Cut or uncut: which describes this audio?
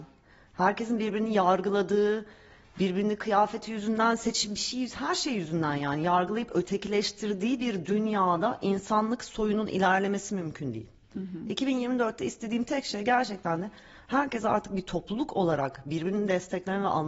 uncut